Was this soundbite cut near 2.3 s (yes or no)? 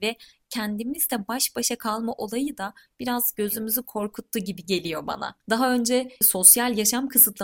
no